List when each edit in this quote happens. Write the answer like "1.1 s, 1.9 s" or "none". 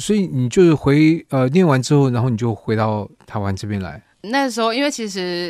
none